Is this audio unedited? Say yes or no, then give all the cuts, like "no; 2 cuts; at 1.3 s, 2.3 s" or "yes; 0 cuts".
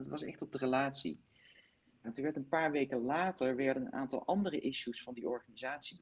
no; 1 cut; at 2.0 s